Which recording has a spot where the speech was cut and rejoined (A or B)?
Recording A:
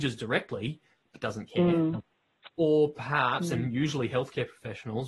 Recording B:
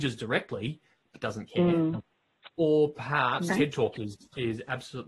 B